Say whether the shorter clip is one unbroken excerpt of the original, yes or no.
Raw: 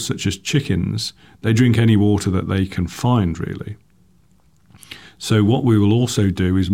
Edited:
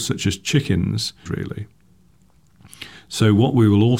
no